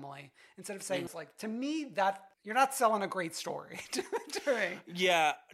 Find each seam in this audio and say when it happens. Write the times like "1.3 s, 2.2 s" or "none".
1.1 s, 2.3 s

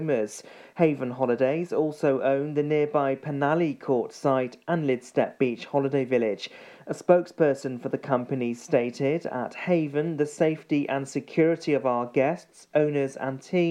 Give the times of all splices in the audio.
none

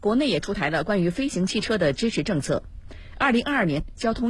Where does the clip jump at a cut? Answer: none

